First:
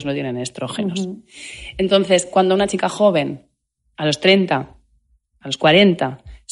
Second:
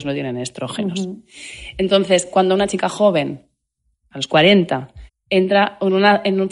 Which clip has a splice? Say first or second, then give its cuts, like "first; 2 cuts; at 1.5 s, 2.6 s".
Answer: second; 2 cuts; at 3.9 s, 5.1 s